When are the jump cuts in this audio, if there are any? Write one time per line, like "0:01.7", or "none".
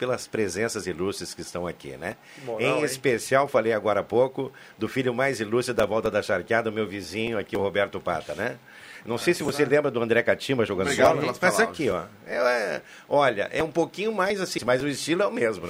0:14.6